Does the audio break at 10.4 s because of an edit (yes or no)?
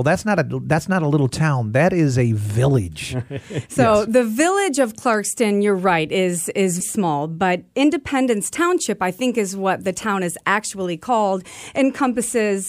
no